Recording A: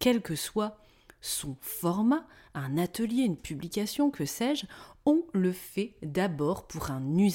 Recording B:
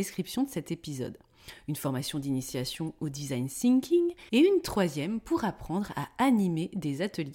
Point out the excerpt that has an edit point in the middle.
B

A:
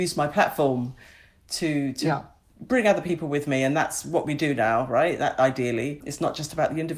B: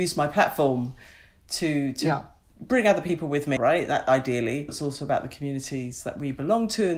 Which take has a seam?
B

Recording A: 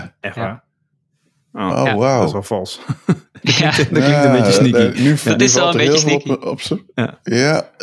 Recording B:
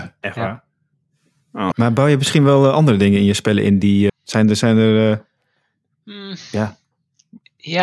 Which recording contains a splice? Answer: B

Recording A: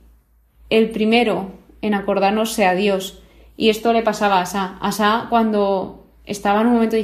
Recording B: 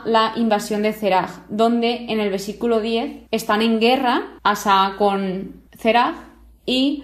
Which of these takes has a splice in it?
B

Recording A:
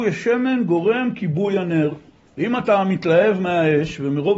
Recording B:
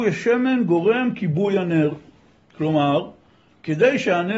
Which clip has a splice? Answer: A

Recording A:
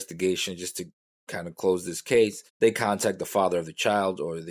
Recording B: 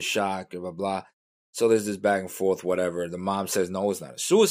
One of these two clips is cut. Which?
A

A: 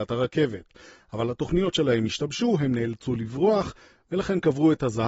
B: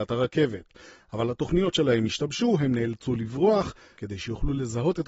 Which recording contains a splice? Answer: B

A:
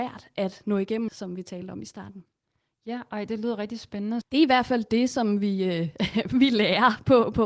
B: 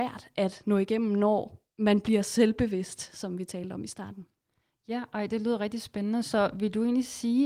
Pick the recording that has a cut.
A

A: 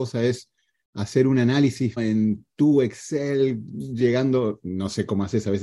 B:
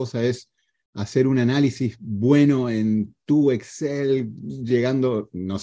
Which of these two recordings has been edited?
A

